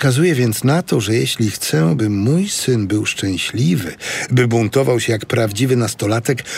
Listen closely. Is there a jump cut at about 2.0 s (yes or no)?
no